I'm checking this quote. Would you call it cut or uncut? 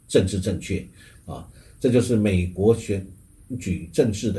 cut